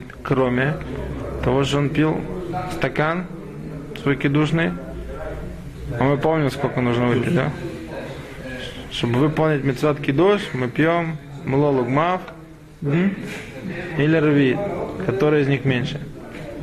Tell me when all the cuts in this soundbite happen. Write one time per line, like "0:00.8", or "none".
none